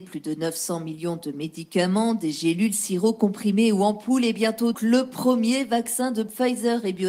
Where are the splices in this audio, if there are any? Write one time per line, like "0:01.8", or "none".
0:04.7